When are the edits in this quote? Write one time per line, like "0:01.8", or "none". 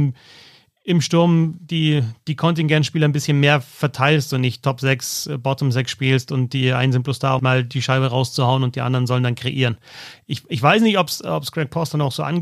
0:07.4